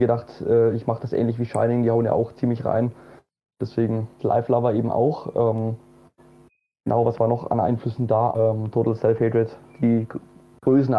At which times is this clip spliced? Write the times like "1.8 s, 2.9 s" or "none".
4.2 s, 8.3 s